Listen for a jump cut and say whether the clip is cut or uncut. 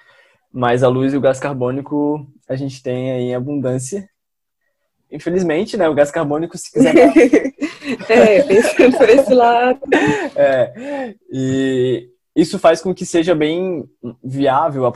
uncut